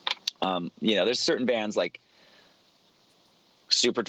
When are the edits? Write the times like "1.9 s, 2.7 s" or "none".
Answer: none